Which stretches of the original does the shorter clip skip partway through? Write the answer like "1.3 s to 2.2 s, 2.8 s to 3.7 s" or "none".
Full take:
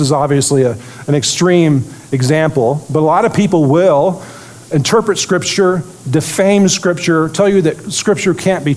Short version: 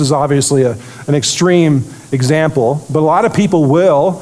none